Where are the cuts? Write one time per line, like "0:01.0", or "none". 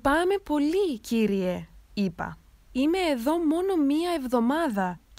none